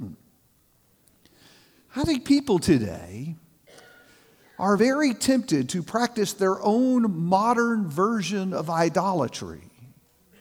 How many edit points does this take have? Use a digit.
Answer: 0